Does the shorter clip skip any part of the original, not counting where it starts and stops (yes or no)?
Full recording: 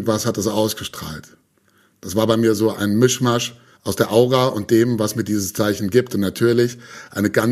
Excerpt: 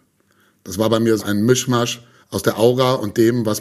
yes